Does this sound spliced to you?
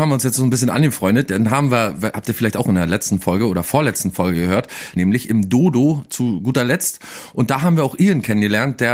yes; 1 cut; at 5.0 s

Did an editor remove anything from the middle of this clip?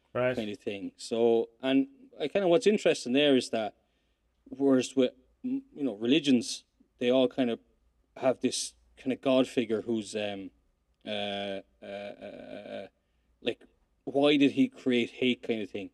no; 0 cuts

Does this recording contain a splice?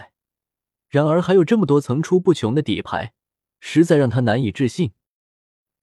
no; 0 cuts

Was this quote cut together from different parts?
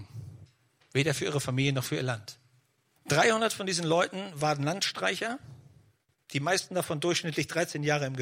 yes; 1 cut; at 3.0 s

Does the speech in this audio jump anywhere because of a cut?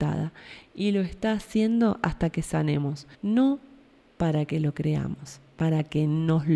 yes; 1 cut; at 3.1 s

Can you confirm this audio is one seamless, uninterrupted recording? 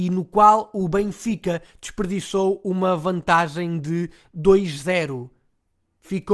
yes; 0 cuts

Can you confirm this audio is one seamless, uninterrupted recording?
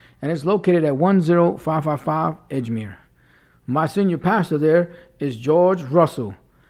yes; 0 cuts

